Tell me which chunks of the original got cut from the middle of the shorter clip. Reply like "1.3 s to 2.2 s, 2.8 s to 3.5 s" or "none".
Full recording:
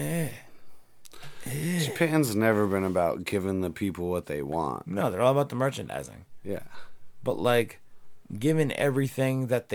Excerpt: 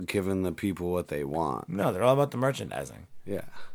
none

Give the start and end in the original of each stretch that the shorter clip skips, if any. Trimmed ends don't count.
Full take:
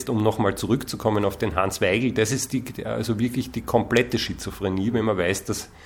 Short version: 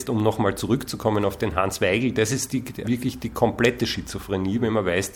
2.8 s to 3.2 s

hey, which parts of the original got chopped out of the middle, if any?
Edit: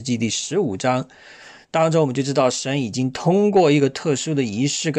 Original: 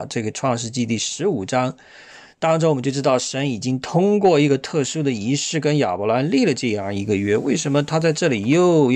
none

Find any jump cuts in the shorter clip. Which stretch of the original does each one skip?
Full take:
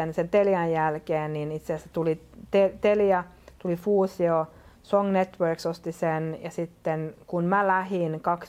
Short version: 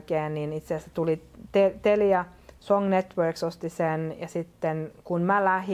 3.6 s to 4.8 s

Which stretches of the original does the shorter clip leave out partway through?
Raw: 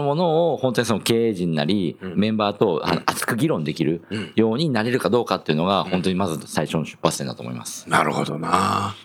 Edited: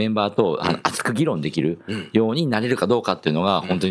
none

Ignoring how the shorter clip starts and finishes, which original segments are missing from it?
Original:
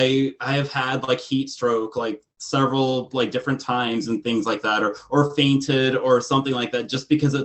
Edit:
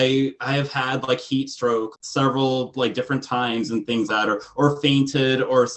1.9 s to 2.3 s, 4.4 s to 4.6 s

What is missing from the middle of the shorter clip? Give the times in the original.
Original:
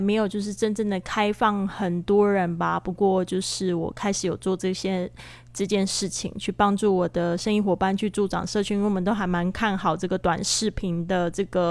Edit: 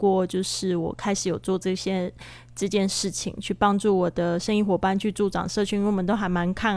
none

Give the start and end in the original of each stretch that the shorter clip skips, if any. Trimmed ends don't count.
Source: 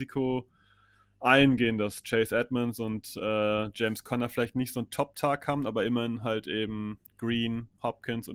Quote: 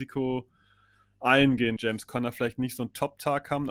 1.8 s to 3.7 s

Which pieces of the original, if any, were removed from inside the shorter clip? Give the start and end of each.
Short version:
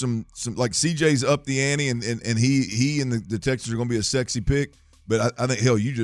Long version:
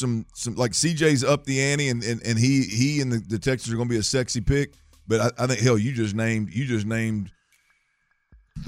none

